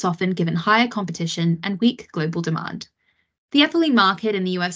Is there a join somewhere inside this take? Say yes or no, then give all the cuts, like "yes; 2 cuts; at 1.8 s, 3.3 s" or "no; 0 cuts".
yes; 1 cut; at 3.4 s